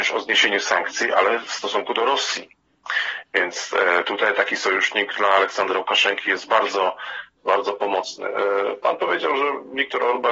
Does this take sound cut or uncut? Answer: uncut